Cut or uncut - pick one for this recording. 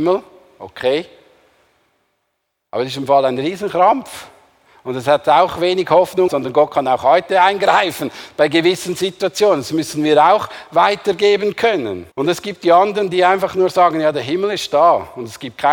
cut